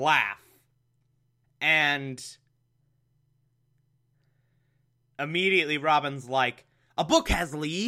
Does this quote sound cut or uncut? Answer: cut